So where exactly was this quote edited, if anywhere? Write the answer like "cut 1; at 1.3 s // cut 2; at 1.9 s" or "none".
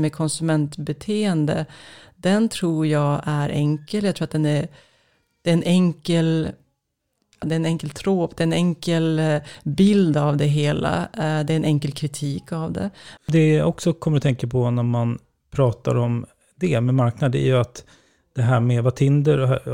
cut 1; at 7.4 s // cut 2; at 13.2 s